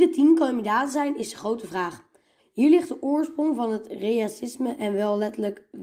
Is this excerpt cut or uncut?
cut